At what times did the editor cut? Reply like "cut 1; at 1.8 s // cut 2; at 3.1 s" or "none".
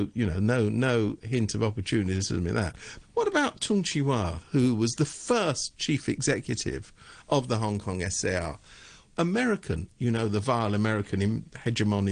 cut 1; at 3.0 s // cut 2; at 9.1 s